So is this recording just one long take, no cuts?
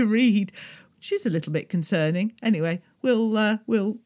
yes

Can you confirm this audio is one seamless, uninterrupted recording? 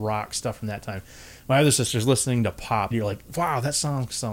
no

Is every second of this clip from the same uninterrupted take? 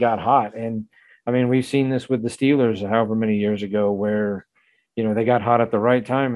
yes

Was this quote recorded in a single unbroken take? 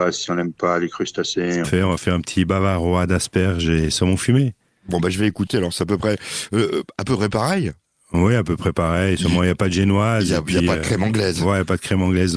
no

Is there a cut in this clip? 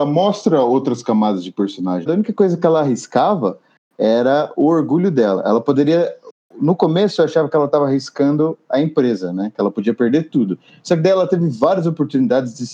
yes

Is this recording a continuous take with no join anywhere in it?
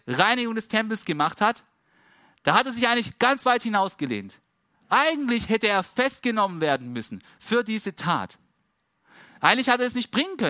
yes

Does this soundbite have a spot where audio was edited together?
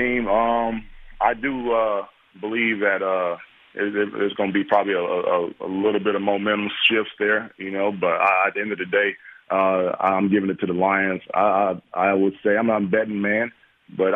no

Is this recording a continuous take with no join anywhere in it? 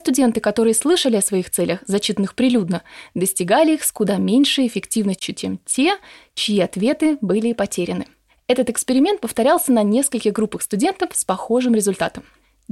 yes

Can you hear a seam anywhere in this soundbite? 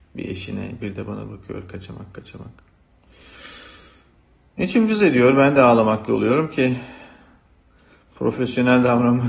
no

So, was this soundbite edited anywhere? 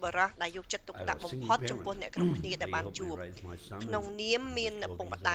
no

